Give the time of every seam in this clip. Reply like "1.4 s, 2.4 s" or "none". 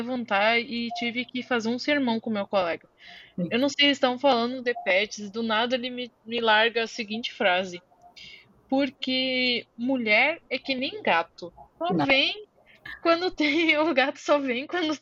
11.8 s